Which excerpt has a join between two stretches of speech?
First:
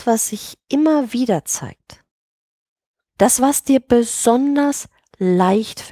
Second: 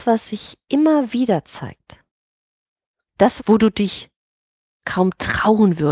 second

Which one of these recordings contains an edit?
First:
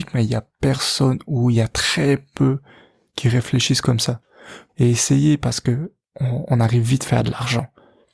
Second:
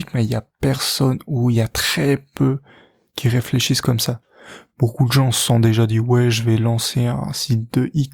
first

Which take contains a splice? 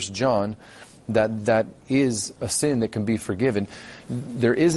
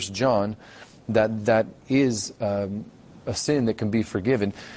first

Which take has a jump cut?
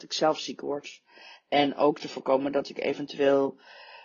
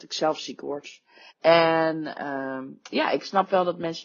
second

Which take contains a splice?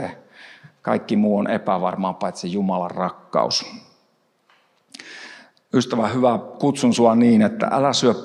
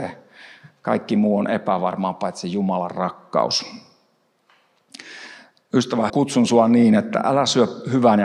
second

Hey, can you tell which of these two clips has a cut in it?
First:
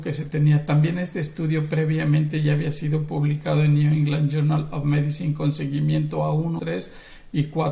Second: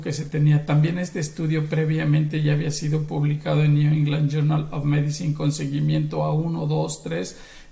first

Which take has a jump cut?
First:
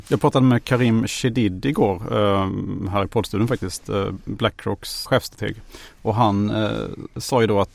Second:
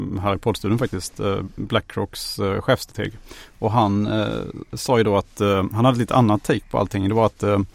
first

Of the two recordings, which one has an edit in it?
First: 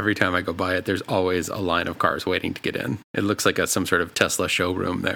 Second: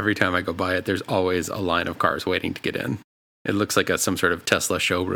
first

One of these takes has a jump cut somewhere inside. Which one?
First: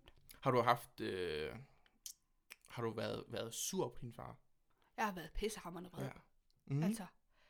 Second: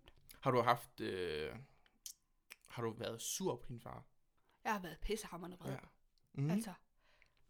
second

